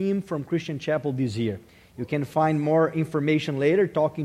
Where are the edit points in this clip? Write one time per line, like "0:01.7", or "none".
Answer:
none